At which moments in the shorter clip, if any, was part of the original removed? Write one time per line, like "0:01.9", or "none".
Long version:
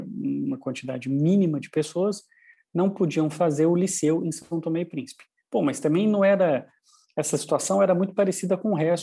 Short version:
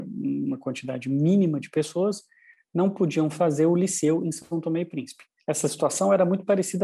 0:05.4